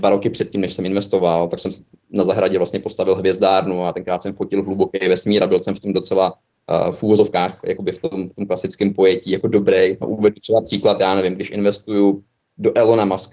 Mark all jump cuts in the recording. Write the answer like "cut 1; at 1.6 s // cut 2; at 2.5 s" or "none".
cut 1; at 10.0 s